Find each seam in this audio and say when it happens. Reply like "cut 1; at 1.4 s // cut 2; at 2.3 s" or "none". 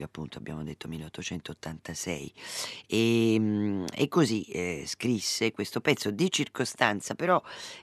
none